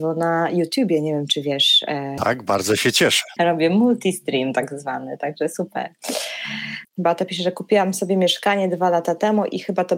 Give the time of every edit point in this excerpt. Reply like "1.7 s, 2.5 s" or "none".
2.2 s, 3.4 s, 6.8 s